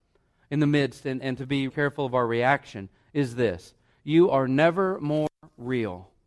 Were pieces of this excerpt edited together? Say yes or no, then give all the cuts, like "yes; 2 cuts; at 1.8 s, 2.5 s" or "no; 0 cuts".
yes; 1 cut; at 1.7 s